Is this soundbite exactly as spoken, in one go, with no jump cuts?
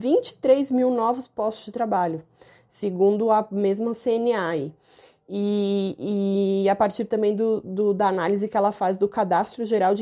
yes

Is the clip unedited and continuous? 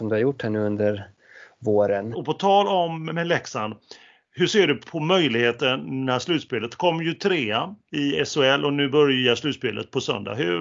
no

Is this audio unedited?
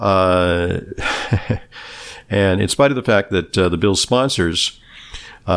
yes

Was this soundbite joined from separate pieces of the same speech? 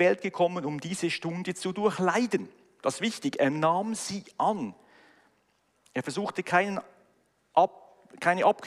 yes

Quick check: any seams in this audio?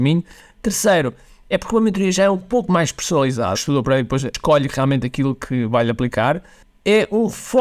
yes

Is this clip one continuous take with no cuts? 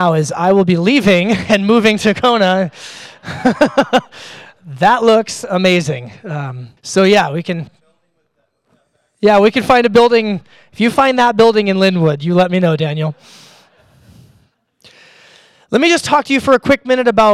no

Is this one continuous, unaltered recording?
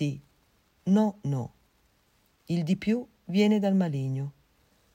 yes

